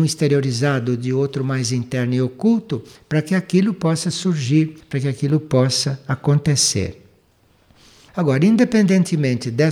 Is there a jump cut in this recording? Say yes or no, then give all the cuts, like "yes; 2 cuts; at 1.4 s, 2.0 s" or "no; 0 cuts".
no; 0 cuts